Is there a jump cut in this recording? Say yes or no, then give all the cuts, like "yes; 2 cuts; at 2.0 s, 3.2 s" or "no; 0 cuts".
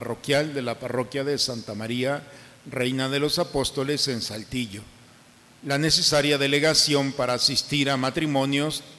no; 0 cuts